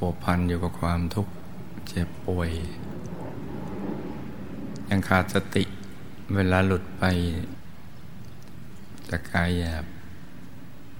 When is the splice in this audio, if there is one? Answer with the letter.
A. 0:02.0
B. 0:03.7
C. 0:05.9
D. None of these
D